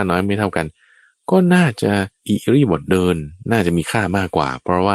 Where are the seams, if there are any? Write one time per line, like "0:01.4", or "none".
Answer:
0:02.2